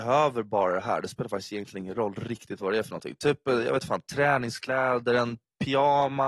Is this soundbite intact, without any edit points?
yes; 0 cuts

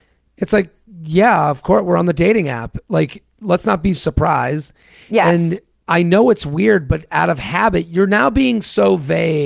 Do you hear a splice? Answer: yes; 1 cut; at 3.9 s

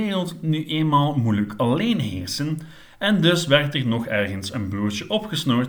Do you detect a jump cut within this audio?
no; 0 cuts

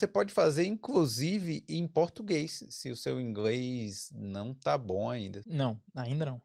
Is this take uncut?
no; 1 cut; at 5.4 s

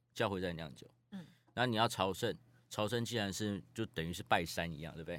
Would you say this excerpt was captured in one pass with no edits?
yes; 0 cuts

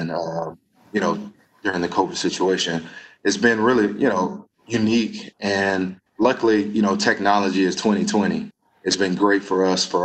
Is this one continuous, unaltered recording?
yes; 0 cuts

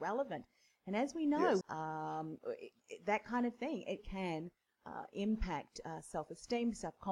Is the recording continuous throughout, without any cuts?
no; 2 cuts; at 1.6 s, 4.0 s

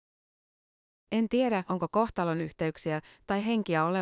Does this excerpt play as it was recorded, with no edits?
no; 1 cut; at 1.0 s

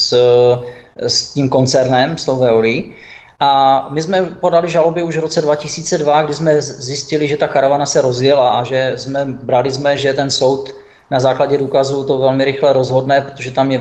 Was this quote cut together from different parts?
yes; 1 cut; at 10.0 s

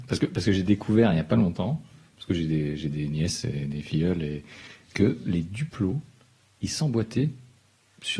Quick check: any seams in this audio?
no; 0 cuts

